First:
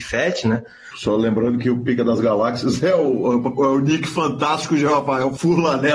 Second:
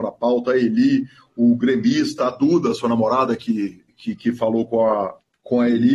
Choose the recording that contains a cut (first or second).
first